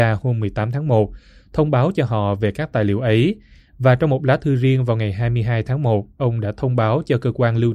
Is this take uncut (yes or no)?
yes